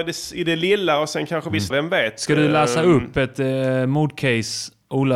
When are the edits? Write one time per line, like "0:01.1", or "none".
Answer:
0:01.7